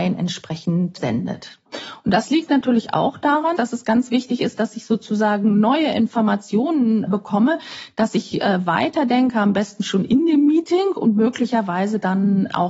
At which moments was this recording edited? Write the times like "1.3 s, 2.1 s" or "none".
3.5 s